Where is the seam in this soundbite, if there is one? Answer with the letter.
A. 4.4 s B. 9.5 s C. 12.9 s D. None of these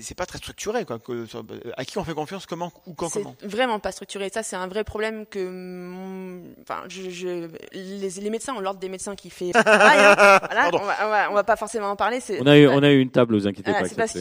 B